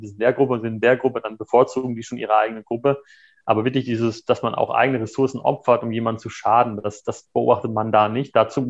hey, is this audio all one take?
yes; 0 cuts

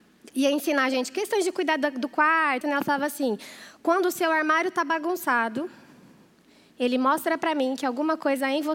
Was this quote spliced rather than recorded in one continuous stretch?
yes; 1 cut; at 2.6 s

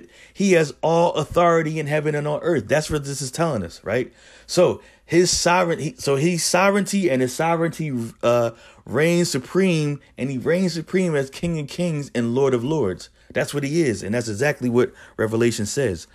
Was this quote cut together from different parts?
no; 0 cuts

